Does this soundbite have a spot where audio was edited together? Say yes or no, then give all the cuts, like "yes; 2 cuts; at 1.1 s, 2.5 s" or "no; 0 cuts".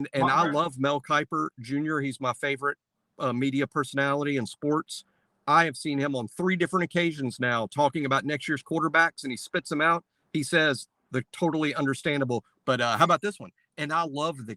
yes; 2 cuts; at 5.3 s, 12.5 s